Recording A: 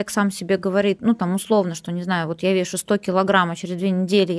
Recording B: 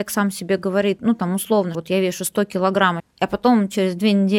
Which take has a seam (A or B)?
B